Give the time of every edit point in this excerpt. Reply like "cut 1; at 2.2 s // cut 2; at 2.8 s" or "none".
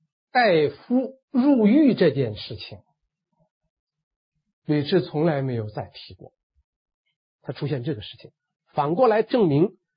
cut 1; at 7.3 s

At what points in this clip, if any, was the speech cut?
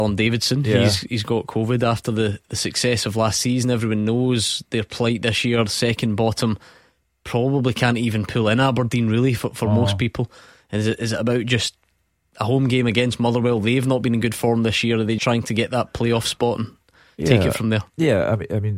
cut 1; at 15.2 s

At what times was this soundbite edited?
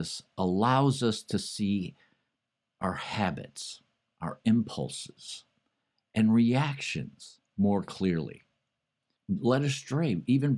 cut 1; at 9.2 s

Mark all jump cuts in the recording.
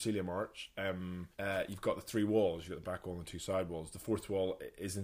cut 1; at 1.3 s

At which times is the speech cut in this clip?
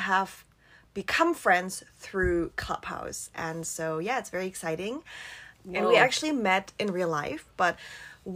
cut 1; at 5.5 s

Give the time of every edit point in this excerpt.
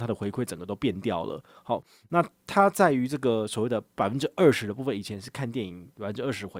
none

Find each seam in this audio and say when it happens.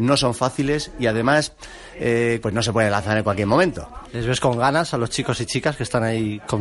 cut 1; at 2.4 s // cut 2; at 4.0 s

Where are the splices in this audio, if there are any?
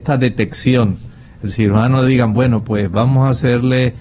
none

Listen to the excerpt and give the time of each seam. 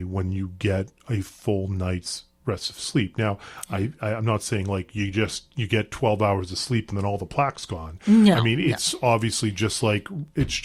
none

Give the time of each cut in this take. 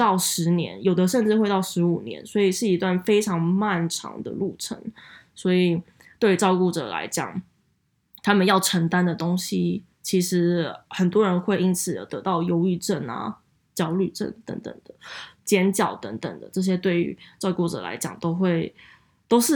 cut 1; at 15.4 s

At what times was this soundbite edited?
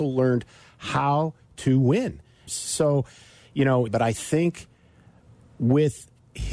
cut 1; at 2.5 s // cut 2; at 3.9 s

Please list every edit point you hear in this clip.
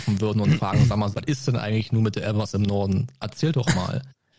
cut 1; at 1.1 s

